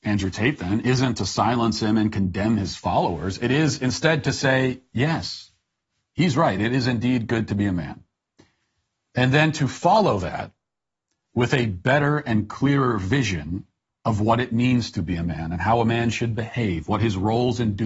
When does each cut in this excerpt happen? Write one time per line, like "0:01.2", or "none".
none